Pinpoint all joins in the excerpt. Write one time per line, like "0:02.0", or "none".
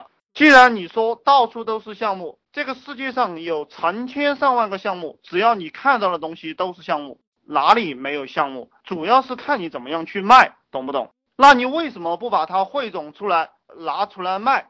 0:02.5